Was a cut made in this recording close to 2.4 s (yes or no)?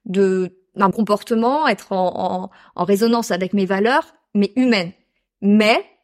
no